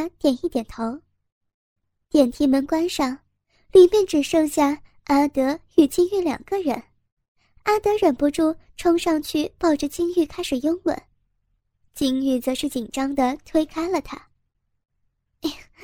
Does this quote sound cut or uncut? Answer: uncut